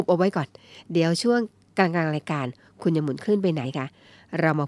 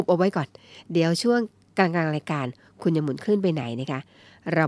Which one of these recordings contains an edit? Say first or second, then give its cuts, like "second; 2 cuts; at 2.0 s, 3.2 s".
first; 1 cut; at 3.6 s